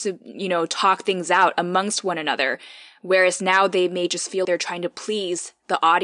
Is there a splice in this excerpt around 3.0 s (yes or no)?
no